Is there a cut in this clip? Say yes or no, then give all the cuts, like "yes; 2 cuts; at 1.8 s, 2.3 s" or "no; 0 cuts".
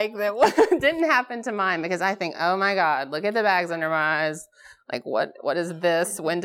no; 0 cuts